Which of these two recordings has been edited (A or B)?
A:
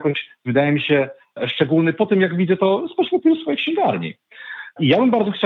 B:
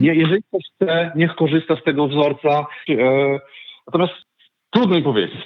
B